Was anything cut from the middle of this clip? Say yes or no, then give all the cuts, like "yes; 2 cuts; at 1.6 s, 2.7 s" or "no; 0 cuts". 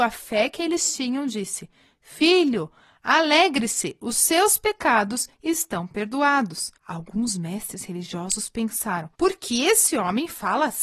yes; 2 cuts; at 6.8 s, 9.1 s